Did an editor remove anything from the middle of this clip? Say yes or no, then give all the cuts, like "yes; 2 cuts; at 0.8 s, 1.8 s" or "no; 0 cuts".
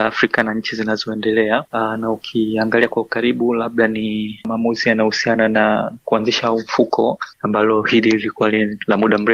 no; 0 cuts